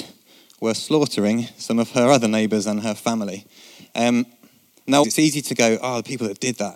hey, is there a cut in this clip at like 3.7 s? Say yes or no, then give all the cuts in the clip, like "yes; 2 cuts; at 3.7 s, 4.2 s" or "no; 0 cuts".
no; 1 cut; at 5.0 s